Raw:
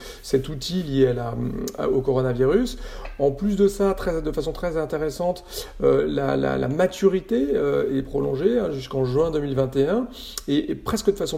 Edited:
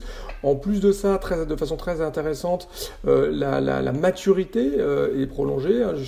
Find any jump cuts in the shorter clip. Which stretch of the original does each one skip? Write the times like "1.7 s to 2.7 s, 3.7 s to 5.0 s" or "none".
none